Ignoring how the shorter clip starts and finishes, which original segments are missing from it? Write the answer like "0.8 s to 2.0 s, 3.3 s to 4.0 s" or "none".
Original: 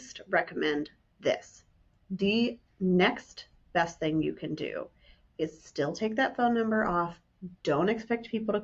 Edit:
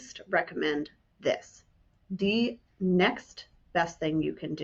none